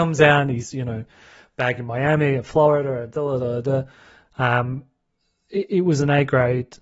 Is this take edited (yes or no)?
no